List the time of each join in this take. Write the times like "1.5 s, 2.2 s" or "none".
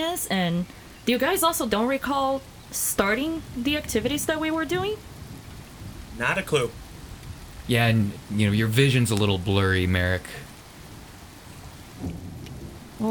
none